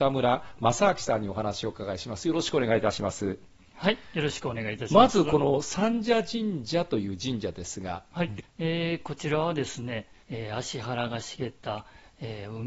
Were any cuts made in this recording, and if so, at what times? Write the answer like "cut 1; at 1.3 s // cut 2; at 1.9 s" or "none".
cut 1; at 8.4 s // cut 2; at 10.2 s

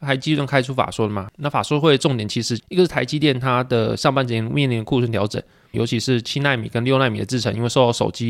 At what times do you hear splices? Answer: cut 1; at 5.7 s

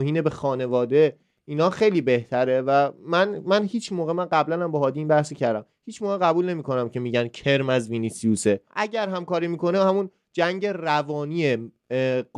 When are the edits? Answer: cut 1; at 8.7 s

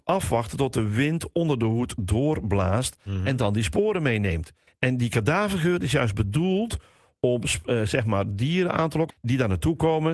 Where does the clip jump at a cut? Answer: cut 1; at 4.7 s // cut 2; at 9.1 s

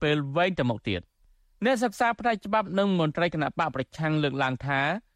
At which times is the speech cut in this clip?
none

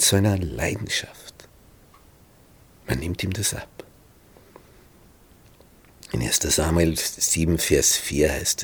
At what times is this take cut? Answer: none

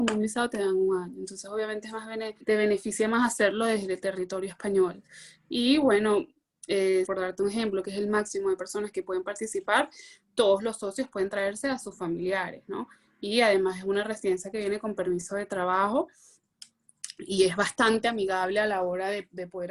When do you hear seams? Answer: cut 1; at 7.1 s

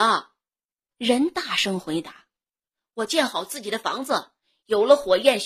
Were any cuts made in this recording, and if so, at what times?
none

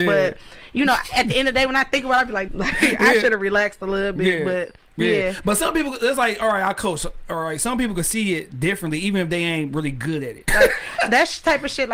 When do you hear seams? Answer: cut 1; at 2.5 s // cut 2; at 10.5 s

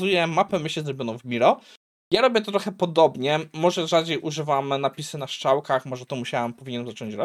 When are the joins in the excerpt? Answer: none

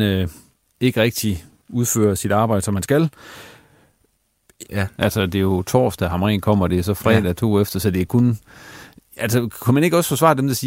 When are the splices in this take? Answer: cut 1; at 4.6 s

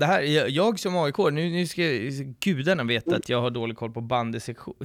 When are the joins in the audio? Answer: none

